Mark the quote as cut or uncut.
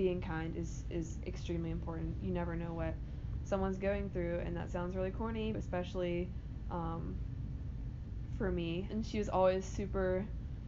cut